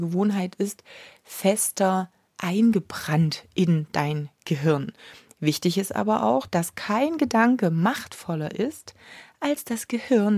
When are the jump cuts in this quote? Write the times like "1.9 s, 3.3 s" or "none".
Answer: none